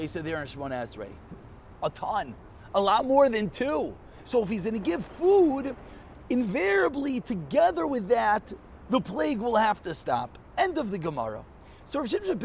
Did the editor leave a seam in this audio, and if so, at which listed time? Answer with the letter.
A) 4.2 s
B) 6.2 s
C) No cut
A